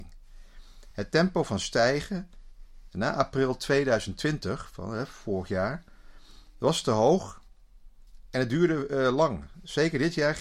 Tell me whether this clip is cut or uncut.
uncut